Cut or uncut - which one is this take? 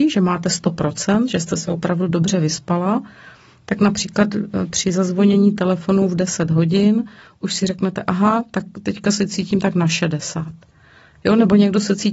uncut